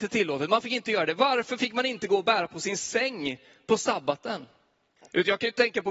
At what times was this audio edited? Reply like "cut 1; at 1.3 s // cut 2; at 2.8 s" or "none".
cut 1; at 5.0 s